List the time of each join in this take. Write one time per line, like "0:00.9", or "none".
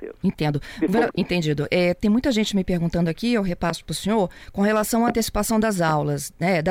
0:01.1